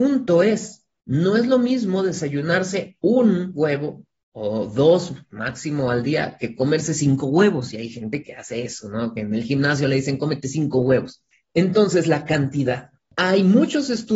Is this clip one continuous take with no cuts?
yes; 0 cuts

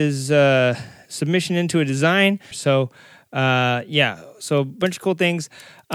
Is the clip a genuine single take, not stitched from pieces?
no; 1 cut; at 2.5 s

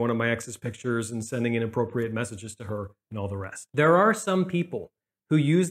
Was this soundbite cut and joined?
yes; 1 cut; at 3.7 s

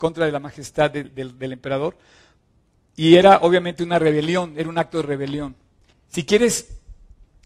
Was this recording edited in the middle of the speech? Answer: yes; 2 cuts; at 1.0 s, 5.9 s

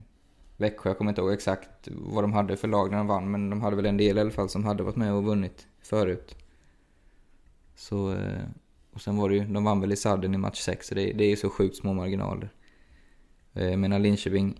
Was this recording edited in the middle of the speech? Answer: no; 0 cuts

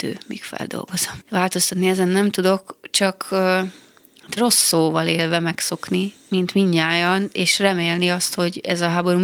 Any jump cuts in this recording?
yes; 2 cuts; at 1.2 s, 4.4 s

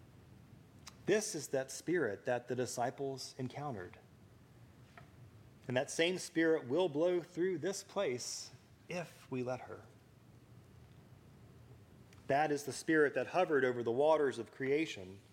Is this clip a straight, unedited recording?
yes; 0 cuts

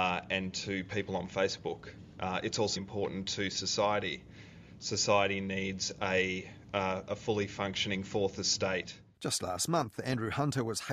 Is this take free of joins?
no; 2 cuts; at 2.8 s, 9.1 s

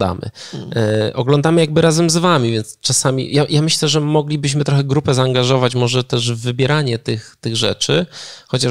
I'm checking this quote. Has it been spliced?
no; 0 cuts

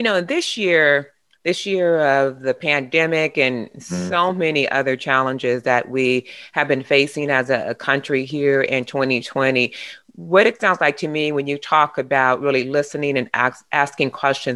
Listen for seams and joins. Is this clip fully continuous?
yes; 0 cuts

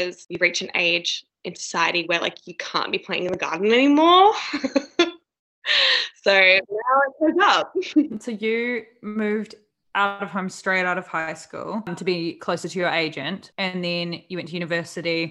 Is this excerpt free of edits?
yes; 0 cuts

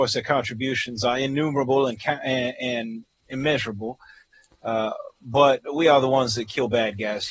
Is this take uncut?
yes; 0 cuts

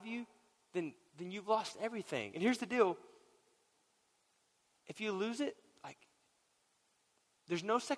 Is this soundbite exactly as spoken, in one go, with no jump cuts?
yes; 0 cuts

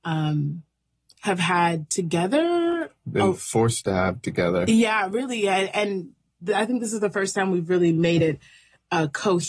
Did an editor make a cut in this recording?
no; 0 cuts

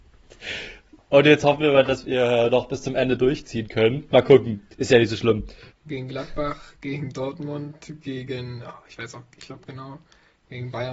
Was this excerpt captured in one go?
no; 2 cuts; at 5.7 s, 9.7 s

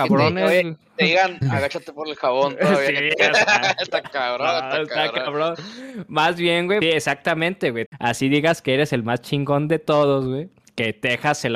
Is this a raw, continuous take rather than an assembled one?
no; 2 cuts; at 6.8 s, 7.9 s

